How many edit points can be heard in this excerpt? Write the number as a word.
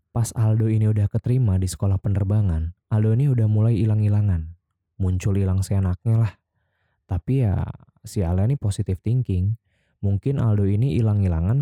one